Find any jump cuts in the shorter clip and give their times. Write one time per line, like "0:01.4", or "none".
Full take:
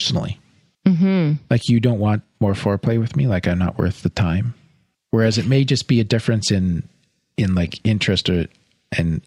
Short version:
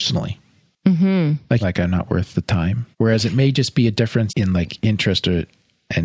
0:01.6
0:02.9
0:04.3